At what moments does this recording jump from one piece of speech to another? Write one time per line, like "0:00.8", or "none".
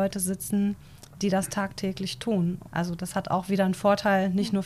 0:02.6